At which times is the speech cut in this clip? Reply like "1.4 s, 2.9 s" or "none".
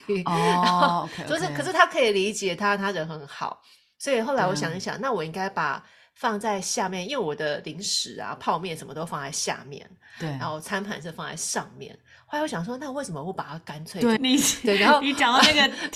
14.2 s